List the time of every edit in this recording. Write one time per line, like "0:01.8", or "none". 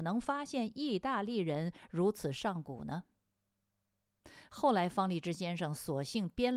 none